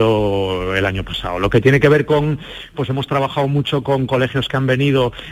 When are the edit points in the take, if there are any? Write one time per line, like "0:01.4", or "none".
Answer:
0:02.7